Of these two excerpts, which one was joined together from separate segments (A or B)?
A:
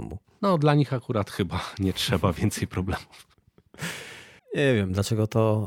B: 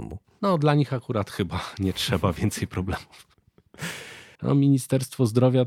B